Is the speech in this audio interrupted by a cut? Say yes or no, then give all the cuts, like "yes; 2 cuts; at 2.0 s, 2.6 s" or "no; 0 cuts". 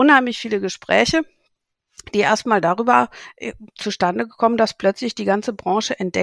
no; 0 cuts